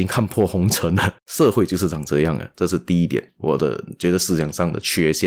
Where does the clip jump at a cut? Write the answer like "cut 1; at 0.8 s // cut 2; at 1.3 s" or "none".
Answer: cut 1; at 1.2 s // cut 2; at 2.5 s